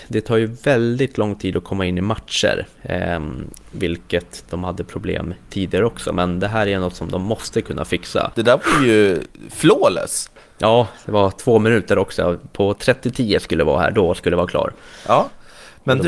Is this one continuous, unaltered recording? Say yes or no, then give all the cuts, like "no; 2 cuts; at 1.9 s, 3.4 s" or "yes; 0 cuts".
no; 1 cut; at 8.3 s